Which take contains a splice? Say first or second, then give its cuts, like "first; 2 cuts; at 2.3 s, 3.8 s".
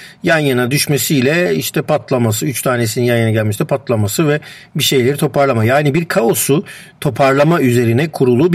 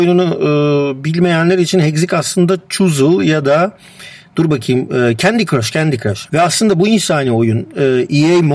second; 1 cut; at 6.3 s